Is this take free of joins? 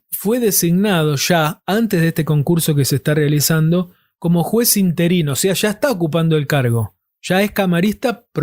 yes; 0 cuts

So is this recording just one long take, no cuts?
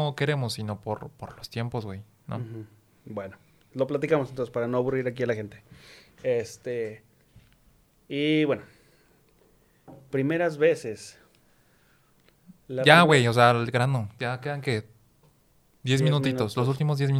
yes; 0 cuts

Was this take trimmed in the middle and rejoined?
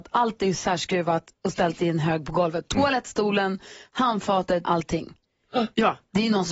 yes; 1 cut; at 4.6 s

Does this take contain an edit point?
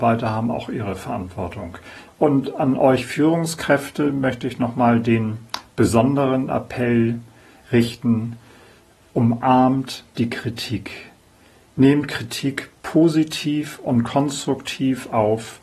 yes; 1 cut; at 2.1 s

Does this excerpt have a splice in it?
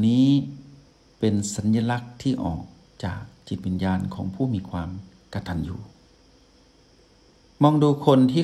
no; 0 cuts

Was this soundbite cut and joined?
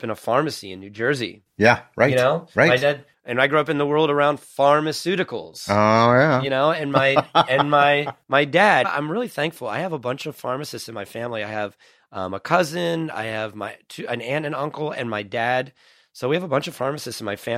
yes; 1 cut; at 8.8 s

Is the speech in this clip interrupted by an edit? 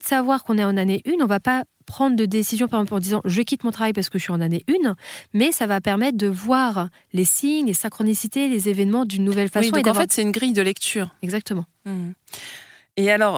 no; 0 cuts

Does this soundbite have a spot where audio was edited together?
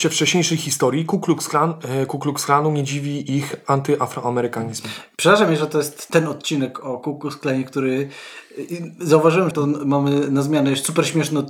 yes; 2 cuts; at 6.1 s, 9.5 s

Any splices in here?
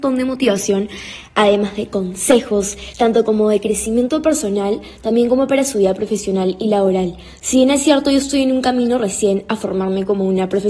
no; 0 cuts

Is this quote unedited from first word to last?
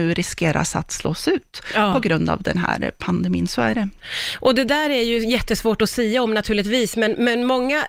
yes; 0 cuts

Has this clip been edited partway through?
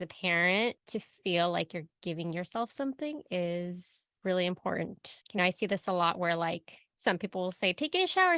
no; 0 cuts

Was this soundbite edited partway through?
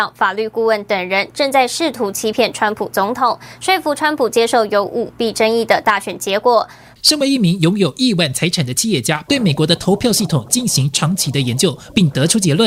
yes; 2 cuts; at 6.9 s, 9.3 s

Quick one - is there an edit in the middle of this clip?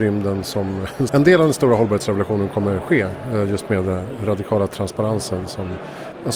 yes; 1 cut; at 1.1 s

